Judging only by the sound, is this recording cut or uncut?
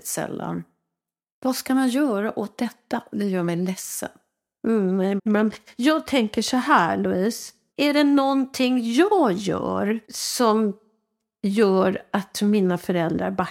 cut